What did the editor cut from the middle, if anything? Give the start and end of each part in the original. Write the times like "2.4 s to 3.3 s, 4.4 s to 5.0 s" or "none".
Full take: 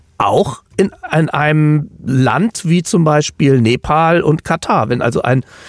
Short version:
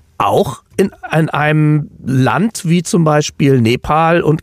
none